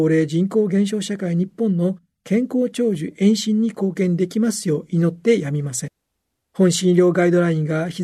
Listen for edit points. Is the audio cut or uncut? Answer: cut